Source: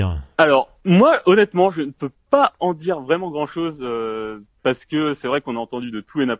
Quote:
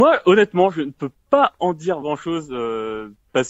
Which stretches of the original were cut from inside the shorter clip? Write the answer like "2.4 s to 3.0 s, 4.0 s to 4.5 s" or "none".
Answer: 3.0 s to 3.3 s